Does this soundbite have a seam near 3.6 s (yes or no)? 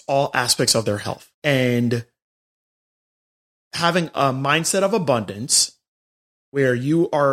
no